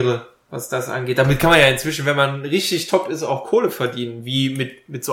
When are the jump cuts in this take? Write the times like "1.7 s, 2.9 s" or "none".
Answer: none